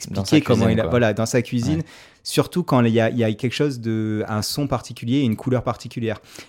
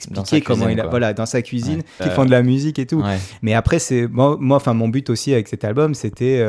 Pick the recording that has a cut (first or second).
second